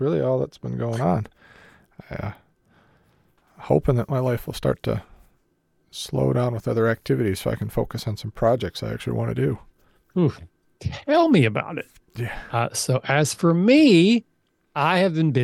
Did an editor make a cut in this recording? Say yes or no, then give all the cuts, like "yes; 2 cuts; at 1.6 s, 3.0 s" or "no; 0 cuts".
no; 0 cuts